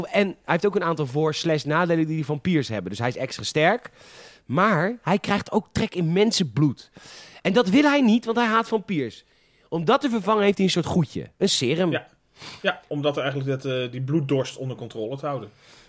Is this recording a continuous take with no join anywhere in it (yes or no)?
yes